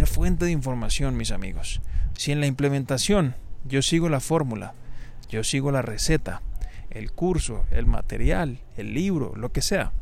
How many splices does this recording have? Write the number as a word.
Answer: two